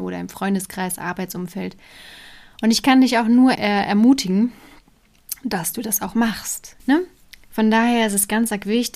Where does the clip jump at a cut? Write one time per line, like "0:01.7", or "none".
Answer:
0:03.5
0:06.8